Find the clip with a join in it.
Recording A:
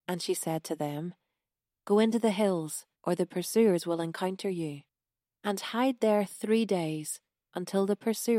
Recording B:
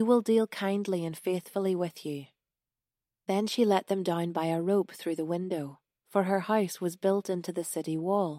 A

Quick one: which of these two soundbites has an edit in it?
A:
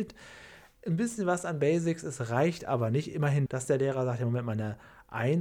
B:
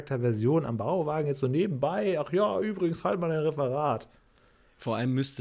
A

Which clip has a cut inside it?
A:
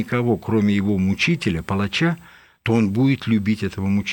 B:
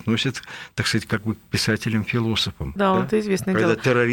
B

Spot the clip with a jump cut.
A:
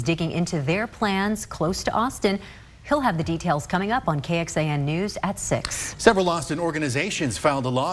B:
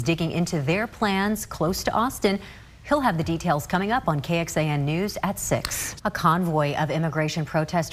B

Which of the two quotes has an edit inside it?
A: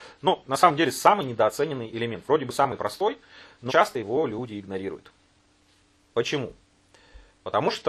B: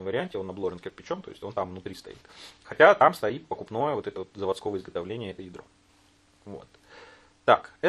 A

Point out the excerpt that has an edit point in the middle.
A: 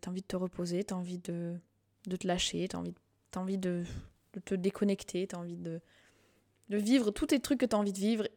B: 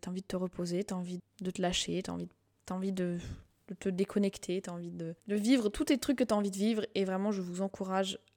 B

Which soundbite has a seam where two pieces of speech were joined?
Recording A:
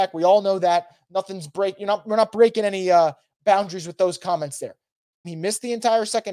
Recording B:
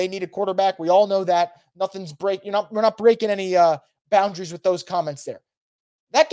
A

